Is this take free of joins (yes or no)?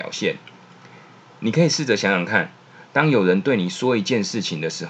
yes